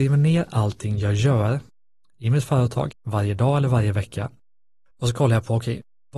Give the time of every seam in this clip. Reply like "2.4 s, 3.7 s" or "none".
2.9 s, 4.9 s